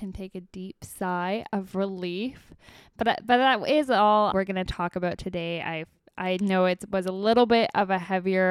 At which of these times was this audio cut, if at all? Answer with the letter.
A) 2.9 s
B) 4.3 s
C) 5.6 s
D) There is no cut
B